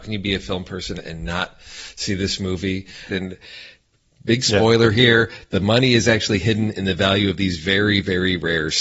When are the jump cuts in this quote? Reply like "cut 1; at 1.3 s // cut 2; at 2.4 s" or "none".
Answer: cut 1; at 3.1 s